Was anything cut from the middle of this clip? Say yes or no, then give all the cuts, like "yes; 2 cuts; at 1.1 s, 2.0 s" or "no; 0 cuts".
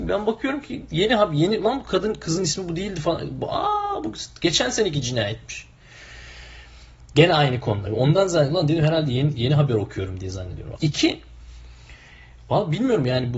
yes; 2 cuts; at 7.9 s, 10.8 s